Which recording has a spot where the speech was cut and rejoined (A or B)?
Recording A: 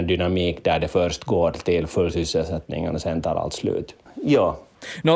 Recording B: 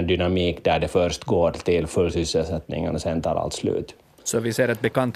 A